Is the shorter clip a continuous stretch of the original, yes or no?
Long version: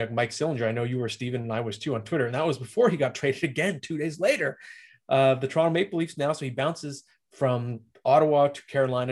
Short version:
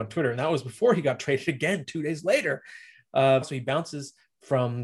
no